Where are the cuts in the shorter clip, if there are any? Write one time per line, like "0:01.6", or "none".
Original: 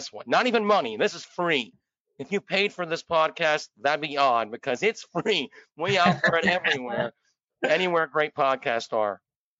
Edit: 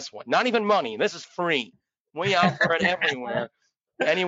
0:02.1

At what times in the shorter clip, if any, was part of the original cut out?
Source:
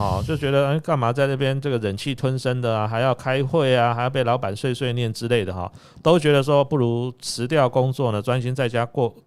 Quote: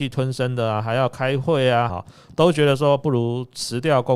0:01.9

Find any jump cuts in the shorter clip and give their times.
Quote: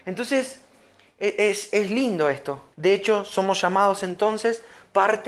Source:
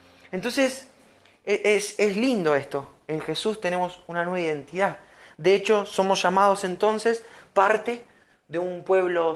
0:02.7

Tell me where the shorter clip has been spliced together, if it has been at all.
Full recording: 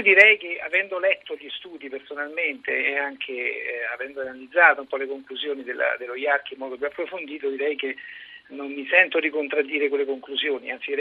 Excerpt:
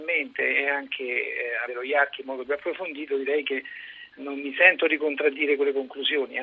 0:01.7

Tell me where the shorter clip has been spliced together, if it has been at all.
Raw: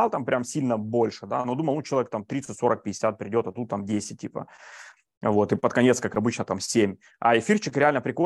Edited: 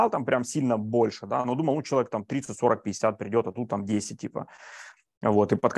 none

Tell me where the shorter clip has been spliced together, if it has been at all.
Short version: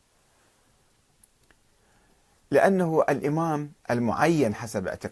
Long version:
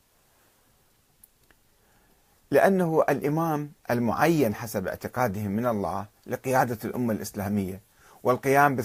none

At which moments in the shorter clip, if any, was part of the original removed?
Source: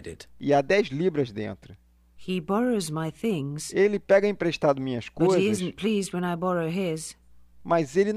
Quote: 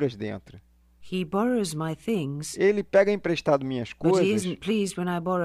none

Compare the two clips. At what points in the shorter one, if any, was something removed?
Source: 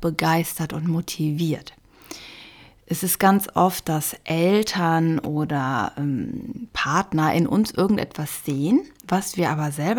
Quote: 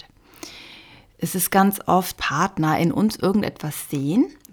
0:02.2

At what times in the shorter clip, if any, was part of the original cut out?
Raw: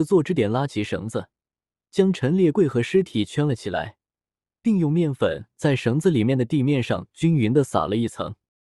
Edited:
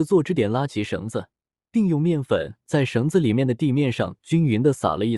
0:01.6

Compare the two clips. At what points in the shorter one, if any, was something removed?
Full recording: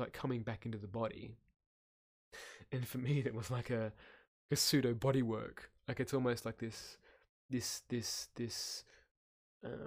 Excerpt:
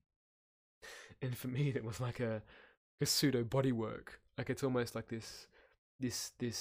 none

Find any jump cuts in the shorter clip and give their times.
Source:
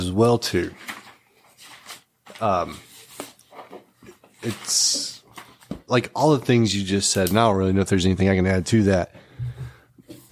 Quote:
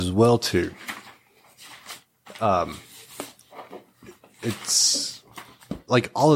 none

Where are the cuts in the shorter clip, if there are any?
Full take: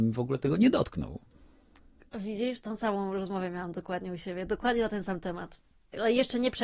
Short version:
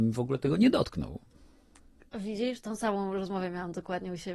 none

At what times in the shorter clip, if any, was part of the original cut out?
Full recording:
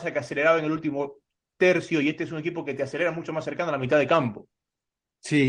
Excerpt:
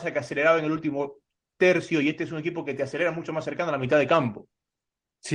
none

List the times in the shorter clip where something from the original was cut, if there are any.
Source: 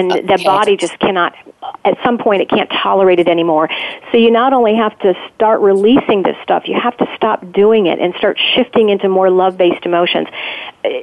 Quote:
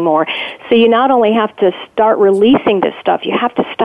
none

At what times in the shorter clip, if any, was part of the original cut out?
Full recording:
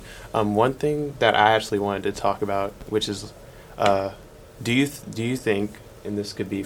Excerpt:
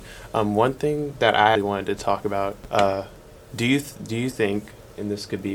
0:01.6
0:02.7

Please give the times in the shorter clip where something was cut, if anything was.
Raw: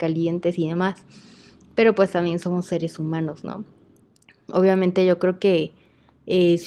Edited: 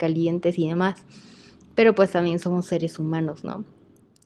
none

